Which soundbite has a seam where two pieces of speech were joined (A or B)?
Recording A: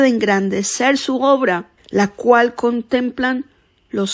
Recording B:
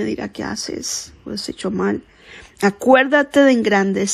A